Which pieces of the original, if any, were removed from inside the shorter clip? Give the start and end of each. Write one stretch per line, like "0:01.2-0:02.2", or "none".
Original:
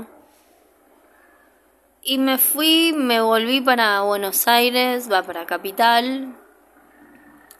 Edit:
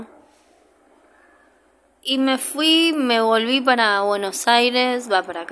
none

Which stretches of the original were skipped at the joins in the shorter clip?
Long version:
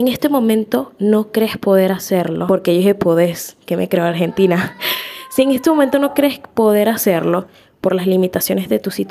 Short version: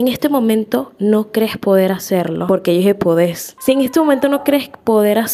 0:03.6-0:05.3

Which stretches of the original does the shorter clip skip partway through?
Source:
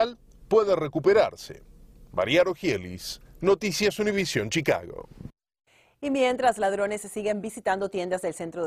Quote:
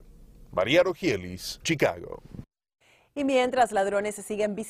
0:03.2-0:04.5

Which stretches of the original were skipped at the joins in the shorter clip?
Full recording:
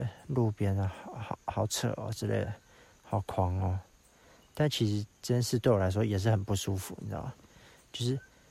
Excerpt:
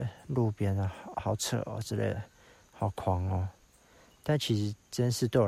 0:01.1-0:01.4

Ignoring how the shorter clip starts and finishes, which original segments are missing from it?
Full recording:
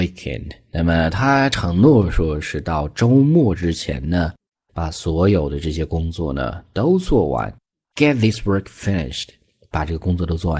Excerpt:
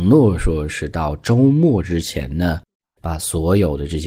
none

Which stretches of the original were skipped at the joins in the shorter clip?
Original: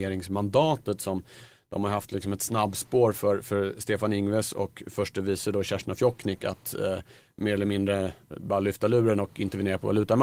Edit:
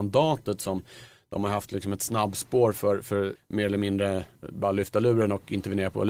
0:03.7-0:07.2

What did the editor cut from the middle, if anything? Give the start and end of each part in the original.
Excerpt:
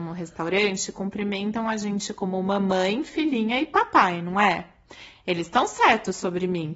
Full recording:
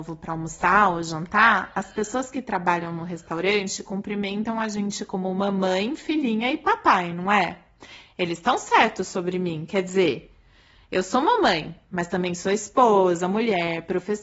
none

